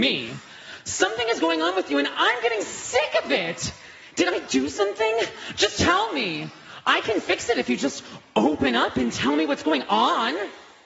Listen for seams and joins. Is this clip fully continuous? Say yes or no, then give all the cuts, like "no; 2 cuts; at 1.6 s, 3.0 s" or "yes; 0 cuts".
yes; 0 cuts